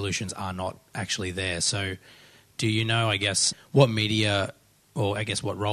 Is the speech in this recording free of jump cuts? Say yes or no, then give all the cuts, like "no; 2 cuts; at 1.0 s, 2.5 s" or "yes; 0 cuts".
yes; 0 cuts